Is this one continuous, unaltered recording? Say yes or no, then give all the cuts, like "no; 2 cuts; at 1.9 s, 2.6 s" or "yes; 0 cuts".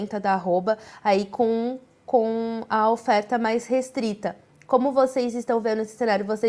yes; 0 cuts